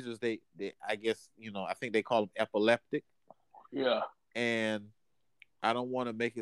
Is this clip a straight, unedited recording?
yes; 0 cuts

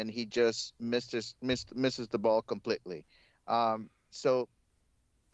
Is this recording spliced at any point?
no; 0 cuts

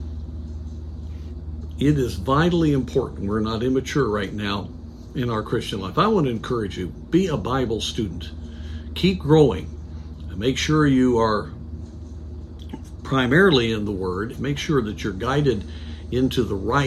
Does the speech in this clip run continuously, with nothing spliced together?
no; 1 cut; at 14.3 s

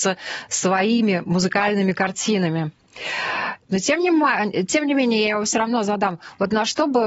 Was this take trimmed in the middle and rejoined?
yes; 1 cut; at 3.7 s

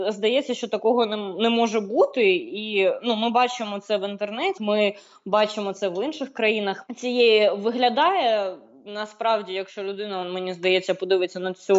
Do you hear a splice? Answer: yes; 2 cuts; at 4.6 s, 6.9 s

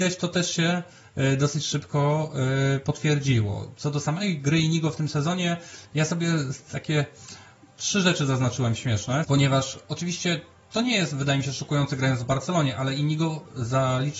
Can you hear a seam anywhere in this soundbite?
yes; 1 cut; at 9.2 s

